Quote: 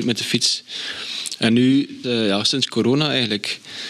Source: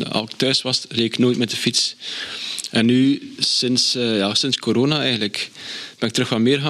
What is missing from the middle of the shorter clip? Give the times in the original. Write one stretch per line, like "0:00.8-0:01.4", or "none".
0:03.4-0:03.9